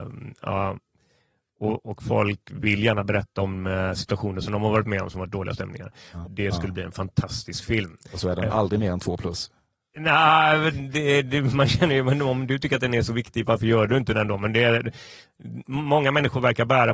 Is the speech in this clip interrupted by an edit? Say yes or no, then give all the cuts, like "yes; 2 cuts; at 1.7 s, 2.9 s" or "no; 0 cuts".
yes; 1 cut; at 6.2 s